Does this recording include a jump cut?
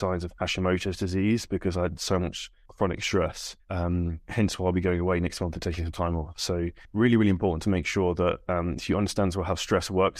yes; 1 cut; at 3.6 s

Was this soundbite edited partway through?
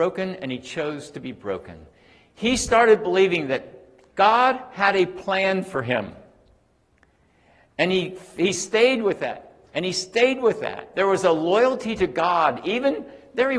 yes; 1 cut; at 10.9 s

